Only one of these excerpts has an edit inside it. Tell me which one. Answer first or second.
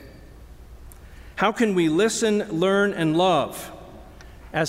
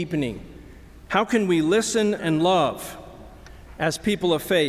second